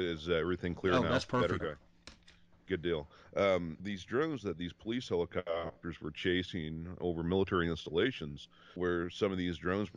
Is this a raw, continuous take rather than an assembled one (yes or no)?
no